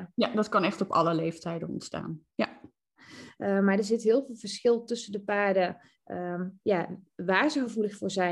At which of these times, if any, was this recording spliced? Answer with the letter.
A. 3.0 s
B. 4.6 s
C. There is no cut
A